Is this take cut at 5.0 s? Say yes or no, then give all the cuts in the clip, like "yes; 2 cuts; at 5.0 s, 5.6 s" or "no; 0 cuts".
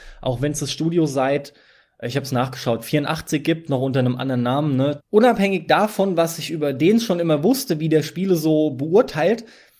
yes; 1 cut; at 5.0 s